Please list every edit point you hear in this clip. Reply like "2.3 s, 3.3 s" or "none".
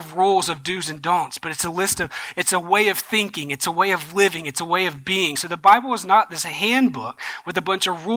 none